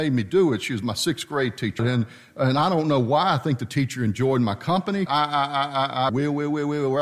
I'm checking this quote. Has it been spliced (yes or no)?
yes